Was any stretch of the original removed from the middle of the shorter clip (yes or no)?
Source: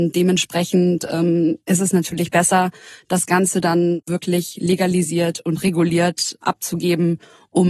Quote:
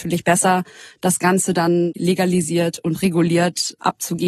yes